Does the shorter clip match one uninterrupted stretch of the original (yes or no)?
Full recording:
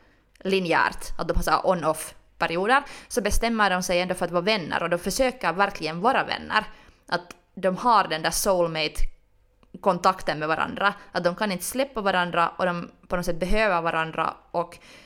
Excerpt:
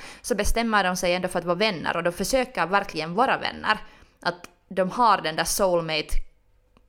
yes